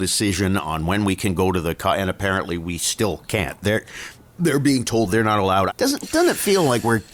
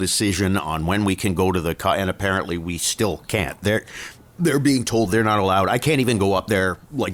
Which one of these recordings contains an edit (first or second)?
first